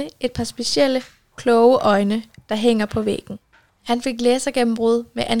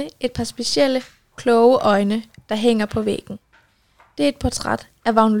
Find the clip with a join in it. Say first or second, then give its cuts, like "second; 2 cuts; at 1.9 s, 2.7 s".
first; 1 cut; at 3.7 s